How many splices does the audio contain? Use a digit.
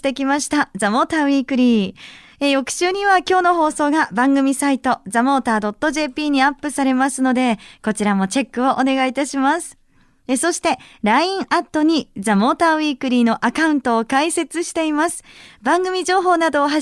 0